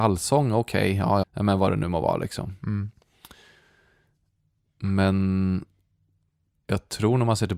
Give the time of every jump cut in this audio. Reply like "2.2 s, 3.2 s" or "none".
1.2 s